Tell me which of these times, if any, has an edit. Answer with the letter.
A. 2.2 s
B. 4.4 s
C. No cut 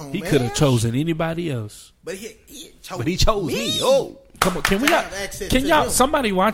C